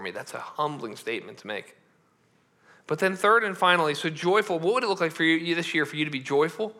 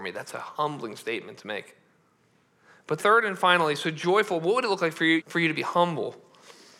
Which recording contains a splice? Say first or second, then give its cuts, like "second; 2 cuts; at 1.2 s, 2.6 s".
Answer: second; 2 cuts; at 3.0 s, 5.2 s